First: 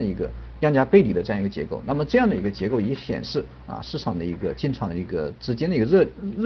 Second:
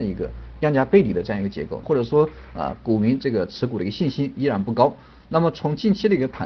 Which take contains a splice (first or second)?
second